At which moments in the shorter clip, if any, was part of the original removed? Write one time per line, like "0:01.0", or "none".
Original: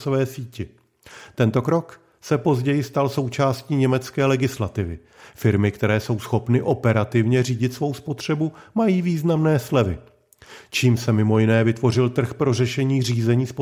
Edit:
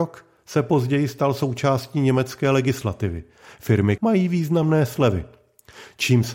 0:04.0

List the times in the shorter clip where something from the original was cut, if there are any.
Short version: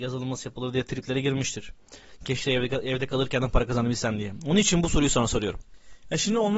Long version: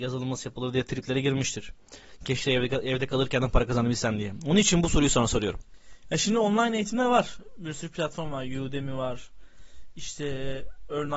none

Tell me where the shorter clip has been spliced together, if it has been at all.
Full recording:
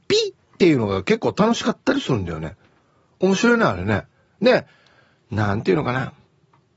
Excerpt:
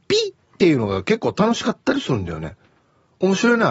none

